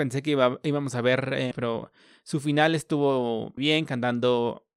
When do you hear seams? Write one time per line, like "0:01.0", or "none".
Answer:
0:01.5
0:03.6